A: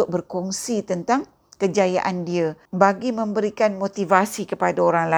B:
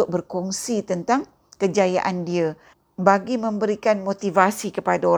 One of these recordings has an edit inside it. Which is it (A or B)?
A